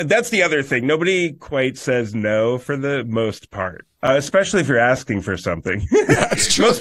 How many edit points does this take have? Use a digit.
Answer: 1